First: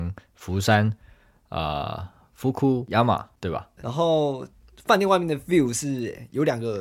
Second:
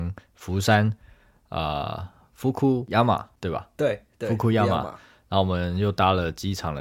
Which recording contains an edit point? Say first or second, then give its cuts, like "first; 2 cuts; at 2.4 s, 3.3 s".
first; 1 cut; at 3.8 s